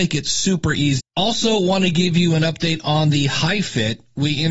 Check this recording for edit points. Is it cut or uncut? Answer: cut